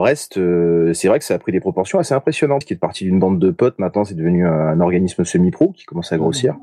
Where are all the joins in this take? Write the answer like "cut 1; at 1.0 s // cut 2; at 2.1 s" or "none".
cut 1; at 2.6 s